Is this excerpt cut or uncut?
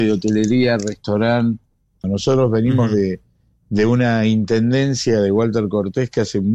cut